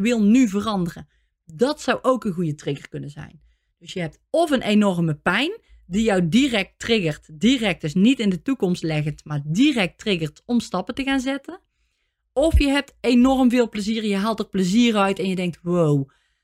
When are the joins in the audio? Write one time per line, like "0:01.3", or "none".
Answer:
none